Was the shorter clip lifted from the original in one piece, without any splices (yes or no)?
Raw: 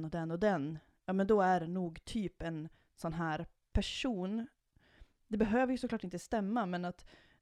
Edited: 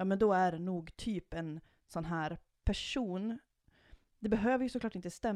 yes